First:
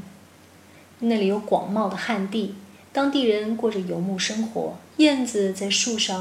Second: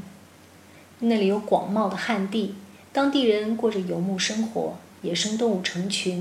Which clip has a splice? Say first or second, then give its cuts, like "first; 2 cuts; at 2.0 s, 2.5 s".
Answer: first; 1 cut; at 4.9 s